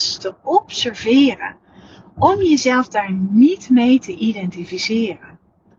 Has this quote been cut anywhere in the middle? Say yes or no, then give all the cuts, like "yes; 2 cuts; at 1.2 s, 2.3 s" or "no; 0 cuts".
no; 0 cuts